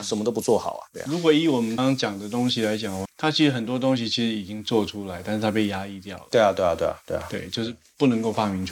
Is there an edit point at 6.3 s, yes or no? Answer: no